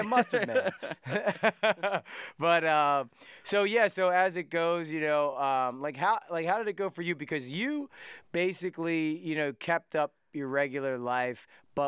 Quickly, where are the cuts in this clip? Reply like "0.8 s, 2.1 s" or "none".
none